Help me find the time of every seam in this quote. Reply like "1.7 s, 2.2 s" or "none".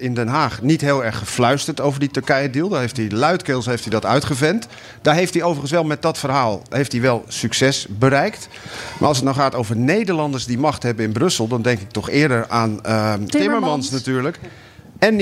13.3 s